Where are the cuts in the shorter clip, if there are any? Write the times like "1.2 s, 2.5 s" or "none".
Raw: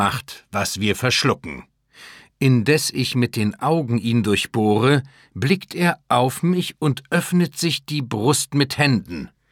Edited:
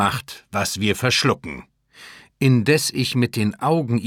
none